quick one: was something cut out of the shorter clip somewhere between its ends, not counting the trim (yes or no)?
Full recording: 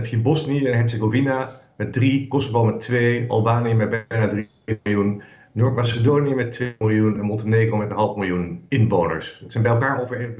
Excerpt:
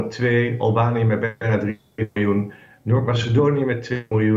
no